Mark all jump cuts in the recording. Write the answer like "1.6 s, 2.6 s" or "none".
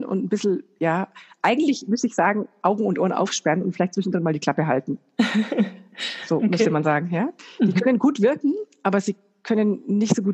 none